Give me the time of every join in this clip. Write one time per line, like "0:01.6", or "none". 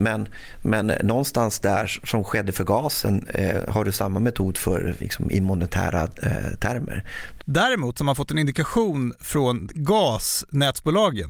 0:05.0
0:07.4